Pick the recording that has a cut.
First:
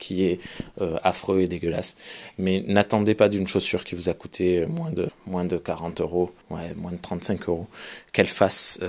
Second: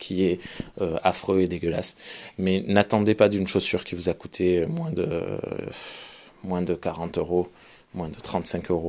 first; 2 cuts; at 5.1 s, 6.4 s

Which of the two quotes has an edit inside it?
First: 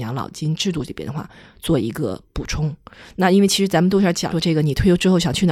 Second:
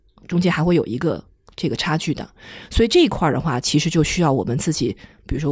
first; 1 cut; at 4.3 s

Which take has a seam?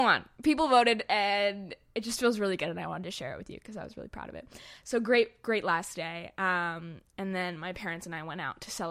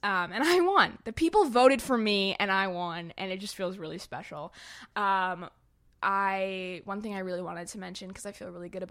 second; 1 cut; at 4.9 s

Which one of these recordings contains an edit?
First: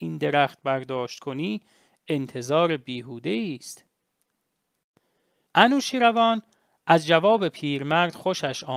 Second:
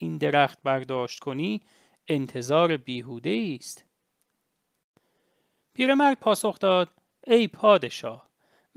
first; 1 cut; at 5.5 s

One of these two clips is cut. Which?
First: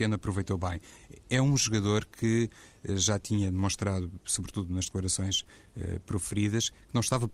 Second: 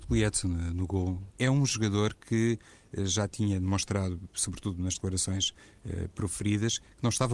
second; 1 cut; at 1.3 s

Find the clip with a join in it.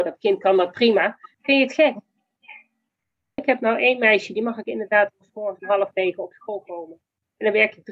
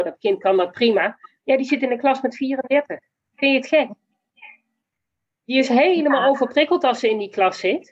first; 2 cuts; at 1.3 s, 3.4 s

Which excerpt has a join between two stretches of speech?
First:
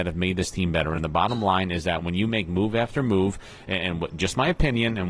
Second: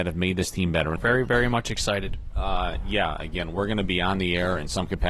second; 1 cut; at 1.0 s

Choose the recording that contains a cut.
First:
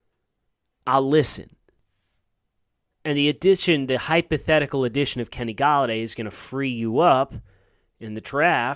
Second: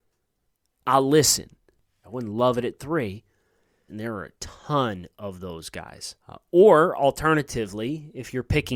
second; 3 cuts; at 2.0 s, 3.9 s, 6.2 s

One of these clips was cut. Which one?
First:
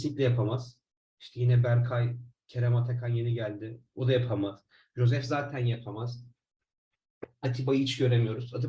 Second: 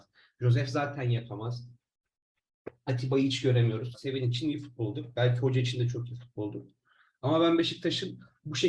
second; 1 cut; at 3.9 s

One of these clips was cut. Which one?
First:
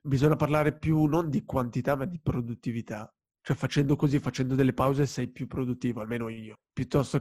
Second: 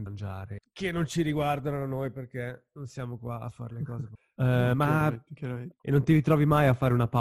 second; 1 cut; at 5.8 s

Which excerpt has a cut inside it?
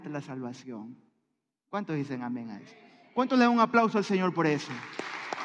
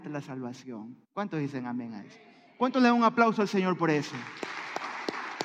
second; 1 cut; at 1.0 s

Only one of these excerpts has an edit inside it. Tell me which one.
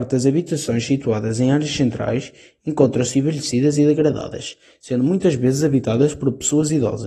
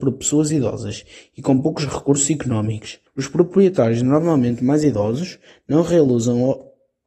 second; 1 cut; at 3.1 s

